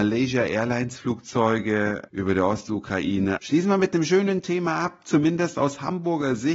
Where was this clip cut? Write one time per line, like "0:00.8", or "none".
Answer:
0:02.1
0:03.4

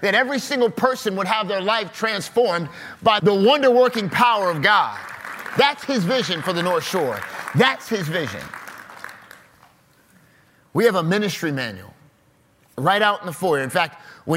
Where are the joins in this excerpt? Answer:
0:03.2

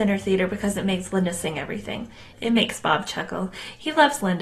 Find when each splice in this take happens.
0:02.3

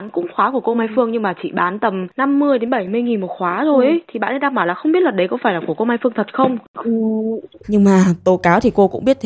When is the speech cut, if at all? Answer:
0:07.6

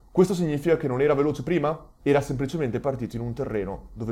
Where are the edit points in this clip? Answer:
0:02.0

